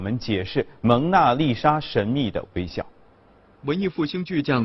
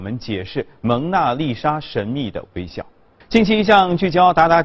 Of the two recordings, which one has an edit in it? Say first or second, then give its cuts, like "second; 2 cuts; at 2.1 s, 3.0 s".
second; 1 cut; at 3.2 s